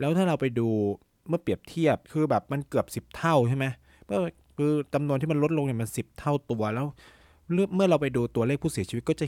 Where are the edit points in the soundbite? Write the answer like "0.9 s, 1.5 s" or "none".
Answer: 2.0 s